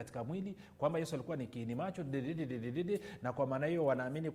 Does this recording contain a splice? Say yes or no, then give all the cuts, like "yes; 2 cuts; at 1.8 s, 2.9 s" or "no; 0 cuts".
no; 0 cuts